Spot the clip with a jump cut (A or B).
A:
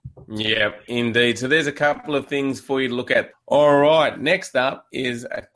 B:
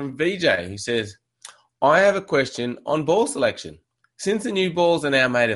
A